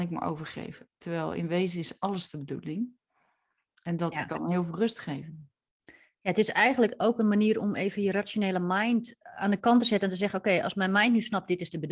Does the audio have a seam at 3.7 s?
no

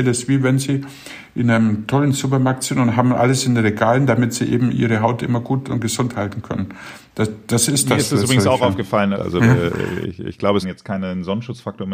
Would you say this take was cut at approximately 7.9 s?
no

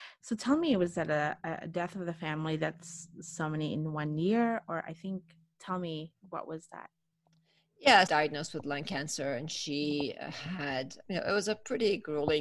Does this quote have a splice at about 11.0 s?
yes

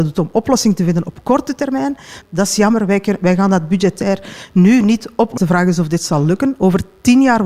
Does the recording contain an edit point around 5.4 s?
yes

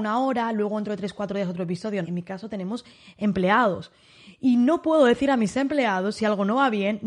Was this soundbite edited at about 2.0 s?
yes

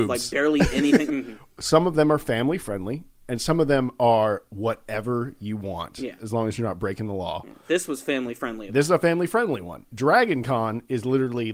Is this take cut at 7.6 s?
no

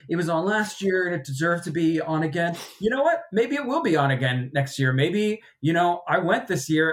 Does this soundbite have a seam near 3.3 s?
no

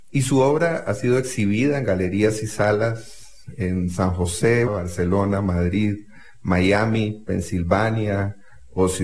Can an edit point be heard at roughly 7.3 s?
no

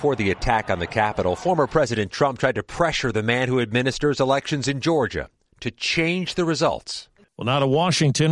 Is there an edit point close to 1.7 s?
no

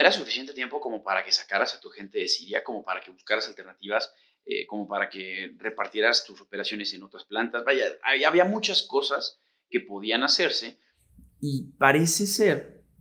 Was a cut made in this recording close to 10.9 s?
no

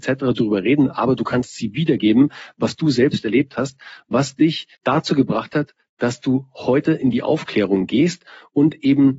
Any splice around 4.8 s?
yes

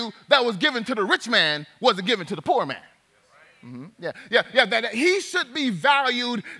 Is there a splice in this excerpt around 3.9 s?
no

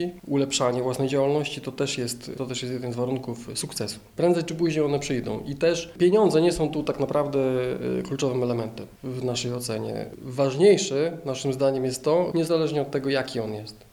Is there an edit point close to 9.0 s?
yes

